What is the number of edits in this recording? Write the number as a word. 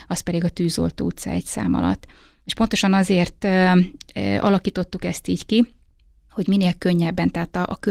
zero